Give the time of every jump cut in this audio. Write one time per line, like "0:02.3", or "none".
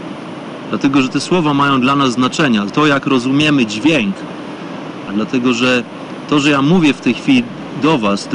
0:02.7
0:05.1